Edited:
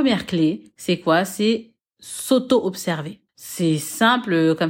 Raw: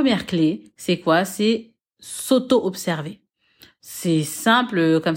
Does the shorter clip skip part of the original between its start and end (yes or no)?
yes